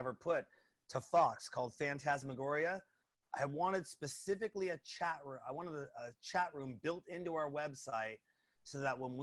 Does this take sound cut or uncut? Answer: uncut